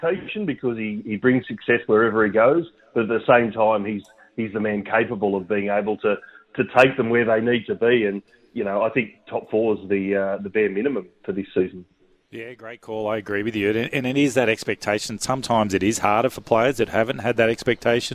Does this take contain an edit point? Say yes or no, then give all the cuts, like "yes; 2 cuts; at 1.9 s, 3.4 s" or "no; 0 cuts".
no; 0 cuts